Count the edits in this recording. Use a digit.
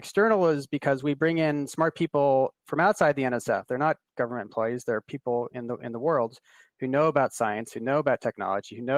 0